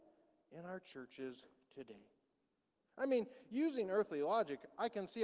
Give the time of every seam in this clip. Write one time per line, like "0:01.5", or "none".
0:02.8